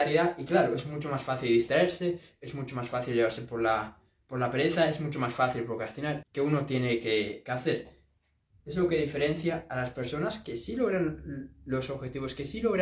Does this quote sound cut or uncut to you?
cut